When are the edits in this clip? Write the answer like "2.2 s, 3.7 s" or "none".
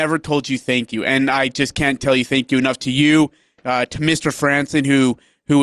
none